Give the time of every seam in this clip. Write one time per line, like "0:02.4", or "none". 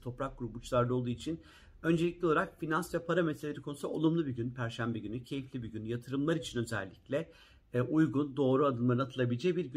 none